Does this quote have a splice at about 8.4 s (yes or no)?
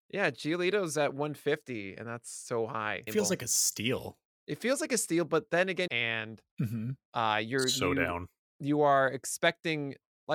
no